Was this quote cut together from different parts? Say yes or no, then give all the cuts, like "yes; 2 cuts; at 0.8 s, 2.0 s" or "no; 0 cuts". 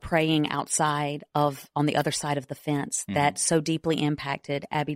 no; 0 cuts